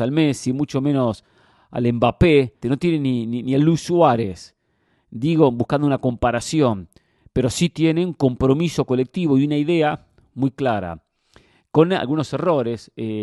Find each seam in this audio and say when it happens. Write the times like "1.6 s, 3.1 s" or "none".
2.6 s

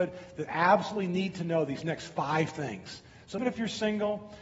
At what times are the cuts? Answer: 3.4 s

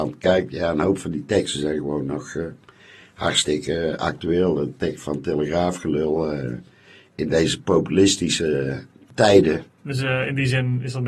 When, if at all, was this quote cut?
9.7 s

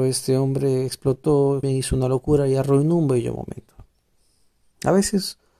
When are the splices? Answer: 1.6 s

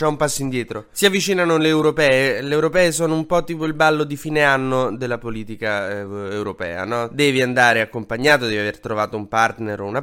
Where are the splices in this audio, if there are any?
none

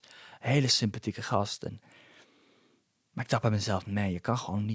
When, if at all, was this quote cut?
none

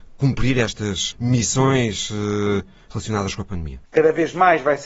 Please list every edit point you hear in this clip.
1.1 s, 3.8 s

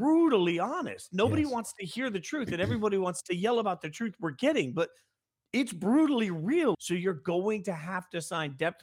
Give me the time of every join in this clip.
6.7 s

